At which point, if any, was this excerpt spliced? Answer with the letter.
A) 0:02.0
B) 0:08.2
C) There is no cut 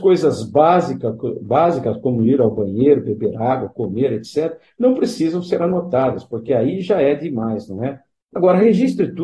B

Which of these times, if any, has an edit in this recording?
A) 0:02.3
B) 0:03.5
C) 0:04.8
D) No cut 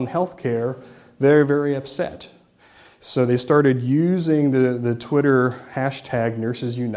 D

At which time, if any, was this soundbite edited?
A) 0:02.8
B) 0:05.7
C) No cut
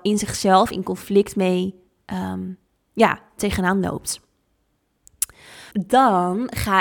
B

